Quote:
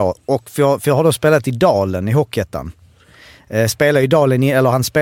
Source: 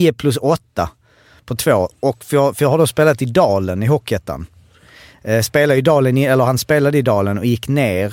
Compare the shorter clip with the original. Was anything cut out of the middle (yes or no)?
no